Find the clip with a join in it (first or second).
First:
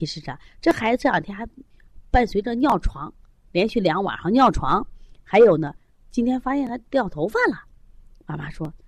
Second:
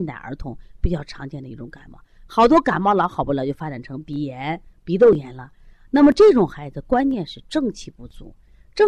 second